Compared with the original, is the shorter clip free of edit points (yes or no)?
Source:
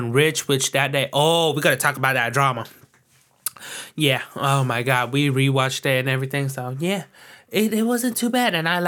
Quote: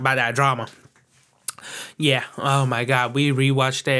yes